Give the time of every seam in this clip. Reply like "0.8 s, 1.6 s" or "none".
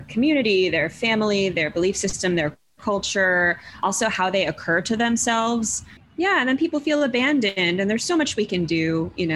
6.0 s